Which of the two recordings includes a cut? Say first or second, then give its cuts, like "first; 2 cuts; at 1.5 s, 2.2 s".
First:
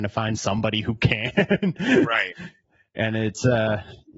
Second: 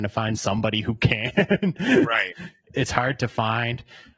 second; 1 cut; at 2.6 s